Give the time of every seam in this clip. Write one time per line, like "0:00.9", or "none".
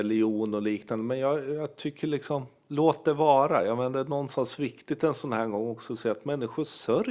none